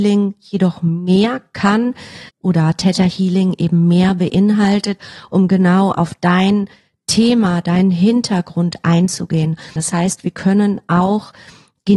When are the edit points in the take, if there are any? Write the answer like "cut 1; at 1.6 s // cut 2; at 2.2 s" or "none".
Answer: cut 1; at 2.3 s // cut 2; at 5.0 s // cut 3; at 9.8 s